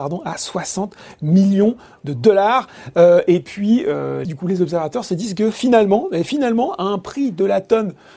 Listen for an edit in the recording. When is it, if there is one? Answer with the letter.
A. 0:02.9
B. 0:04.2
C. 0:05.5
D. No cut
B